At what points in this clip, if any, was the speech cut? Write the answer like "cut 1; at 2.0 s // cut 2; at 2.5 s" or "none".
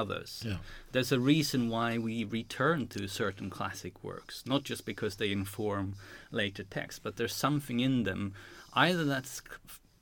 none